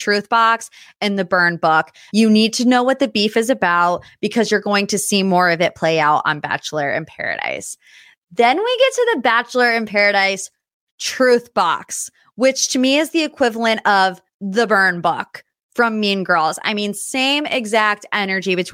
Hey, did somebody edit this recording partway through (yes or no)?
yes